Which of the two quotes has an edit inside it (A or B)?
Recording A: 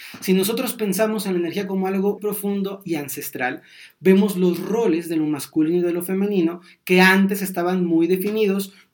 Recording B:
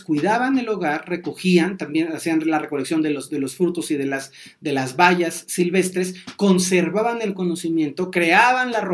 A